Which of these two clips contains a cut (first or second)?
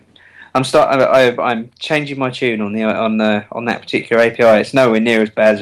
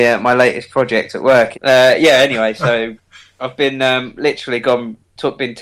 second